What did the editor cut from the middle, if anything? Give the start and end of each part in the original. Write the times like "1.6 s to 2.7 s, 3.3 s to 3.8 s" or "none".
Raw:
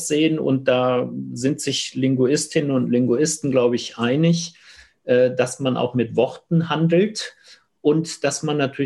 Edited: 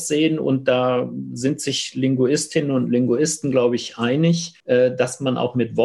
4.6 s to 5.0 s

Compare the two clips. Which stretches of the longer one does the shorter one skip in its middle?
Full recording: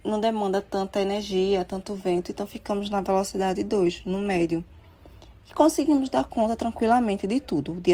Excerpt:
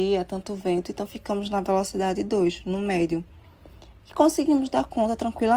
none

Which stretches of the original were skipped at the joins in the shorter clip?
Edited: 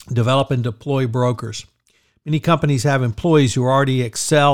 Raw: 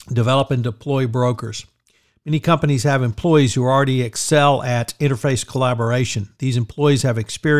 none

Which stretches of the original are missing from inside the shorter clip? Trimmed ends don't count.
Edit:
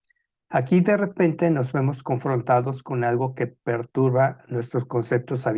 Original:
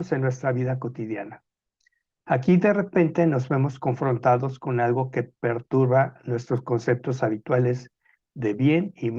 none

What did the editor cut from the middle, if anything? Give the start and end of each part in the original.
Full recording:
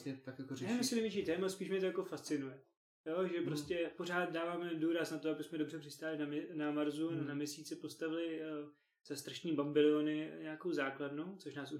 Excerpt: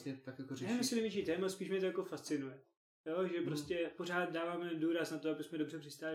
none

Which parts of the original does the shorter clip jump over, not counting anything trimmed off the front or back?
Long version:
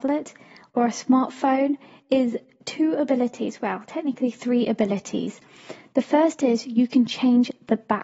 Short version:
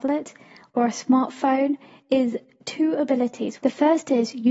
3.6 s to 5.9 s

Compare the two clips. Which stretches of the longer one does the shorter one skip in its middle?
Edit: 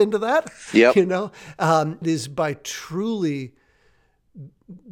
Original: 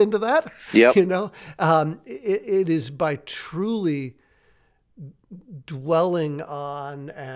2.0 s to 2.6 s

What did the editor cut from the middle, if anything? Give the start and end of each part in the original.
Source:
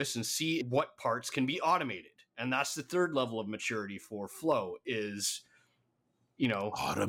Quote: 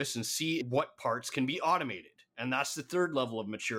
none

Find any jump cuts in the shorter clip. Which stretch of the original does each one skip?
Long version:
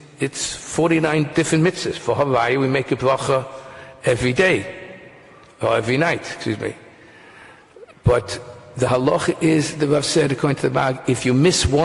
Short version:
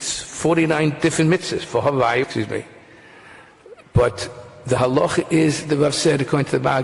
2.6 s to 6.3 s

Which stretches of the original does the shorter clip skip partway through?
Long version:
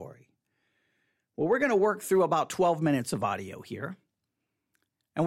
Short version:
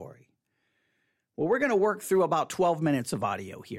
none

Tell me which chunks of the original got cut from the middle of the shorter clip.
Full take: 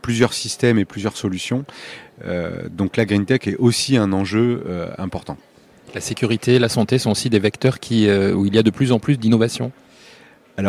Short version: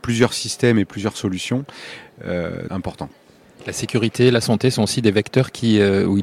2.7 s to 5.0 s

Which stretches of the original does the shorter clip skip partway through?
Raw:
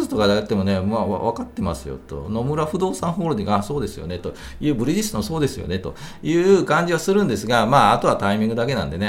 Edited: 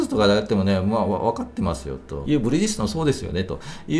2.2 s to 4.6 s

